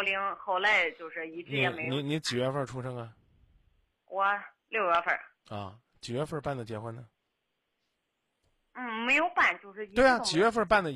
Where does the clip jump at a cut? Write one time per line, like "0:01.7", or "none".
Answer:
none